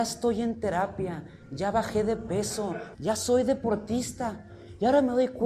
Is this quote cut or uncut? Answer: cut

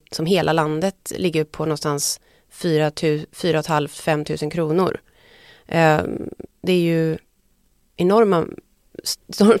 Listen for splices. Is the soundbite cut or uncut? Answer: cut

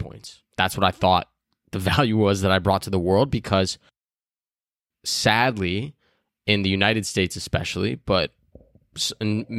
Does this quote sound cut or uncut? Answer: uncut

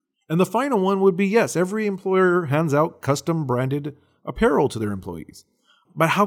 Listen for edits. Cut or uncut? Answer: uncut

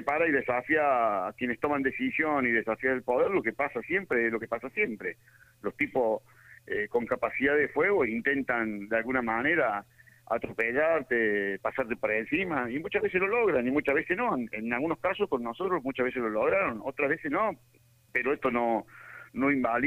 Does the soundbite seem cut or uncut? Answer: uncut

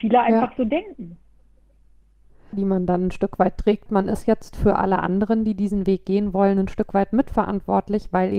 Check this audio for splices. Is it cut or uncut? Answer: cut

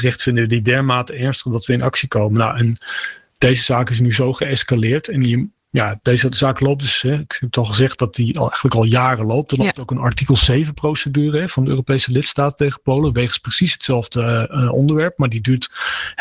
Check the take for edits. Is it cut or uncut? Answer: uncut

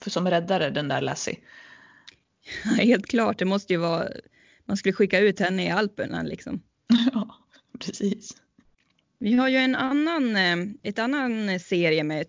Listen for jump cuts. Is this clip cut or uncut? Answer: uncut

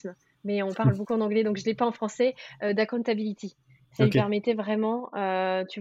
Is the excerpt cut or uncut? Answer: uncut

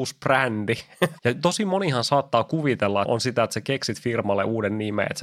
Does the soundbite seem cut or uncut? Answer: cut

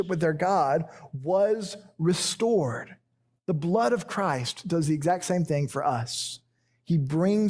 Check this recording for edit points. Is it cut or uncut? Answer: uncut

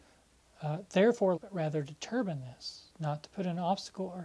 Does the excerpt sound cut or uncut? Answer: cut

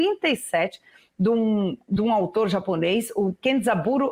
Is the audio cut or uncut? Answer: uncut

